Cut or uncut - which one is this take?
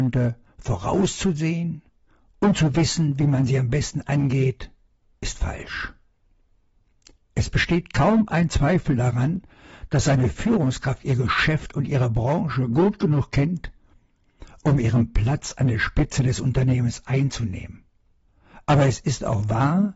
uncut